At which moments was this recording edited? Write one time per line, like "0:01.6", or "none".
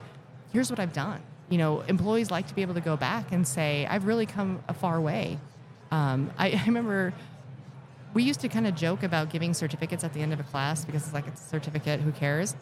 none